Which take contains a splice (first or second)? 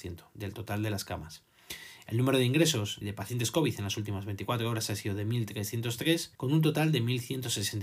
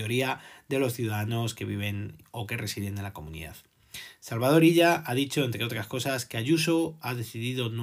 first